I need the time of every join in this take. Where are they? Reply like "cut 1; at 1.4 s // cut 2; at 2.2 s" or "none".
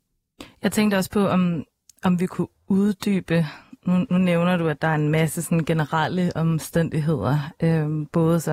none